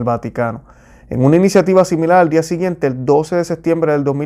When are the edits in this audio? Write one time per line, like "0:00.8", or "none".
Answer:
none